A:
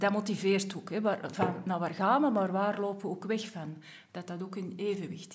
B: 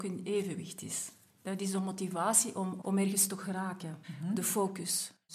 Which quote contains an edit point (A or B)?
B